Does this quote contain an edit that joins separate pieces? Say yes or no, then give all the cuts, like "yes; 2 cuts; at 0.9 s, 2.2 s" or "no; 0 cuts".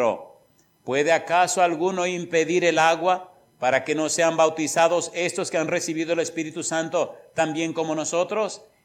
no; 0 cuts